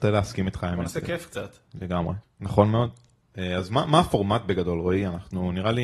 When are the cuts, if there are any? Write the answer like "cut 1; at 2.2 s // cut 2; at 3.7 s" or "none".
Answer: cut 1; at 2.2 s